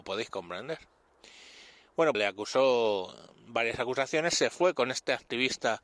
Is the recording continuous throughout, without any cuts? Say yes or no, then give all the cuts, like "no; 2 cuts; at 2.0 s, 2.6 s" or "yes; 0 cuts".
no; 1 cut; at 2.1 s